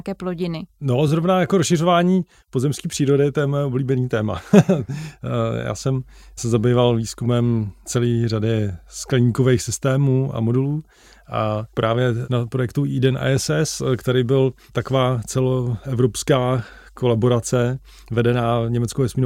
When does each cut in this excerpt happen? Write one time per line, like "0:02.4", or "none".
none